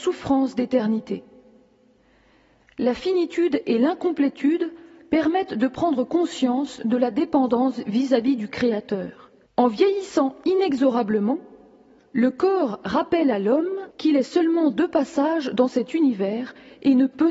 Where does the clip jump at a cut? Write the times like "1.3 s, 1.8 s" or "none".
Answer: 9.5 s, 13.9 s

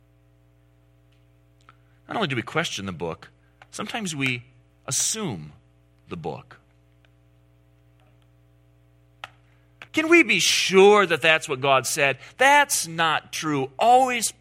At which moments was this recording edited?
9.9 s, 12.3 s

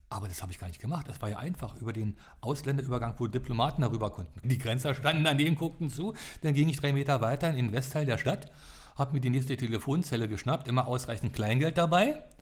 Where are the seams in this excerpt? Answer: 4.4 s

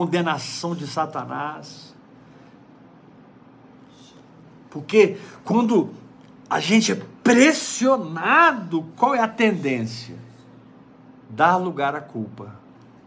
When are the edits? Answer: none

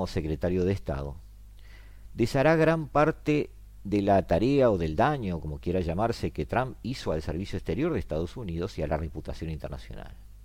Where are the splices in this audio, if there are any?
none

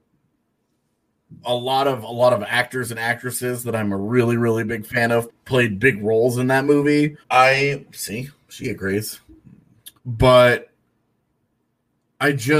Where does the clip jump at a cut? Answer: 5.3 s, 7.2 s, 10.0 s

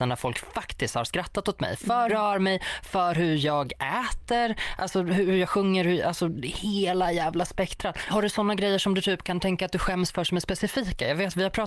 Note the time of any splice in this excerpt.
2.1 s, 8.1 s

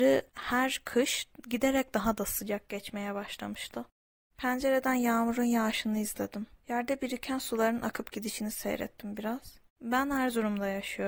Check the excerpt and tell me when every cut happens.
4.3 s, 9.7 s

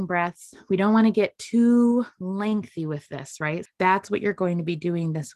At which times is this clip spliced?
3.6 s

